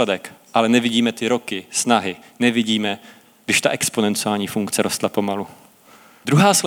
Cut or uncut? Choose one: uncut